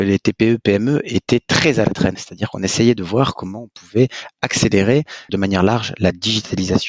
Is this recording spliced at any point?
yes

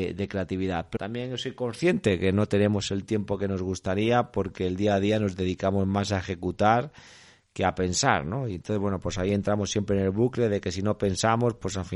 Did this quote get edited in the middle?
yes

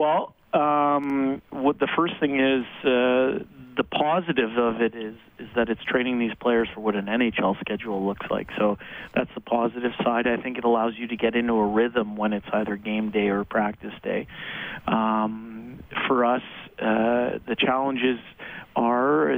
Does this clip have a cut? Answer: no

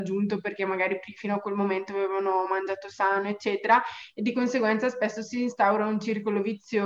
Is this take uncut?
yes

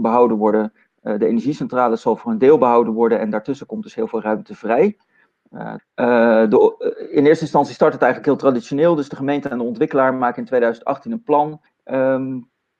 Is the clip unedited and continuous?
no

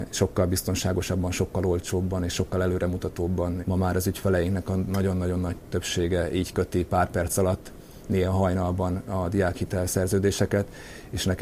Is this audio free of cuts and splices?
no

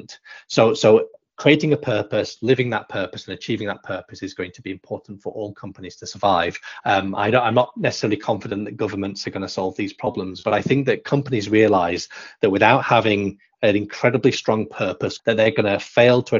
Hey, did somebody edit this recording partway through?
yes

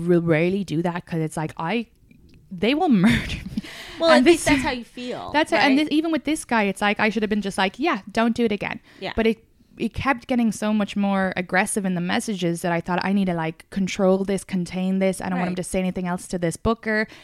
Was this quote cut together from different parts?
no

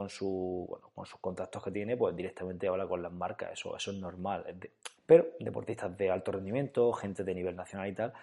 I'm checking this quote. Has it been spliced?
yes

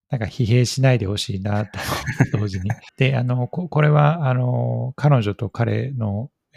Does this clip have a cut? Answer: yes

